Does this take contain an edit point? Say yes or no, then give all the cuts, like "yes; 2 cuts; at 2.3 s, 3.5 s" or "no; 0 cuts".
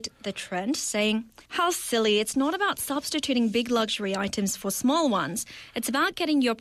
yes; 1 cut; at 1.4 s